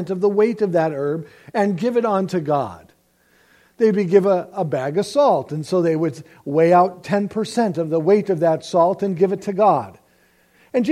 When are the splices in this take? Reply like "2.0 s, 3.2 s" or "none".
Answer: none